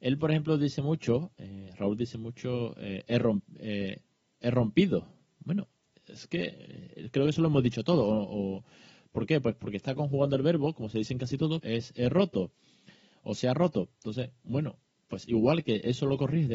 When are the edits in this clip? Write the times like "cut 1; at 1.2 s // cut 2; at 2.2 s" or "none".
cut 1; at 11.6 s